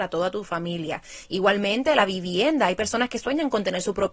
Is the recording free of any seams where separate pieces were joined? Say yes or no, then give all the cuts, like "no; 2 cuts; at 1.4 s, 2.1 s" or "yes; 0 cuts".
yes; 0 cuts